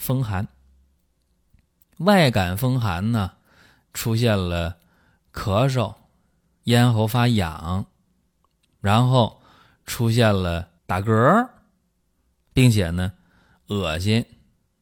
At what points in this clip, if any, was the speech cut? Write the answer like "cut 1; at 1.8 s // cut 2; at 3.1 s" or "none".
cut 1; at 10.8 s